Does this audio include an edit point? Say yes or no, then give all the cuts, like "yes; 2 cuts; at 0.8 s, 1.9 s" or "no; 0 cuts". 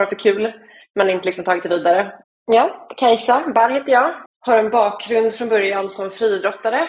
yes; 2 cuts; at 2.2 s, 4.3 s